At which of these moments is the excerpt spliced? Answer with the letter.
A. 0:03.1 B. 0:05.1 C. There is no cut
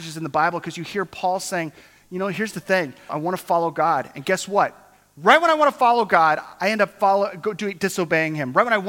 A